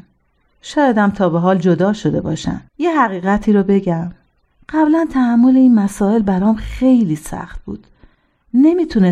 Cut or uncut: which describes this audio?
cut